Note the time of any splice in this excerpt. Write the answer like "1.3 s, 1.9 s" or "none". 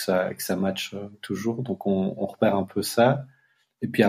none